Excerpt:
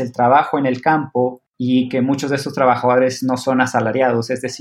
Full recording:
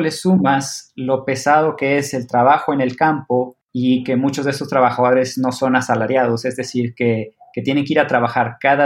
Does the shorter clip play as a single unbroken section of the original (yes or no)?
yes